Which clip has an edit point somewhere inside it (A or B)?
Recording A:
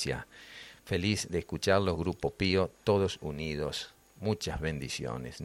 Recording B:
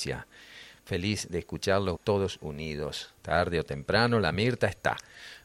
B